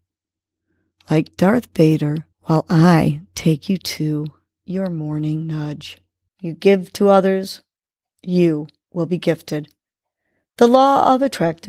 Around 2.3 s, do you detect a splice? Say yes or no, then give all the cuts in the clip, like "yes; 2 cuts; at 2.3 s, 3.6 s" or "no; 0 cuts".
yes; 2 cuts; at 2.3 s, 6.3 s